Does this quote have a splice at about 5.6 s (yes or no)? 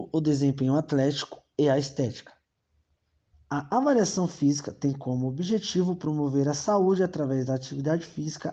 no